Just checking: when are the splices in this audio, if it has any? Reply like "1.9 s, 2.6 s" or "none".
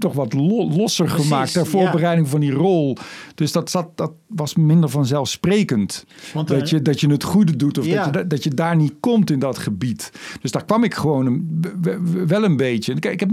none